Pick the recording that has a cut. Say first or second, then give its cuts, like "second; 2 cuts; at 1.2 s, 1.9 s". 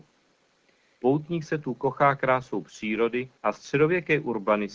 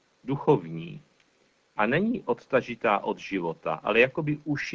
first; 2 cuts; at 1.0 s, 3.4 s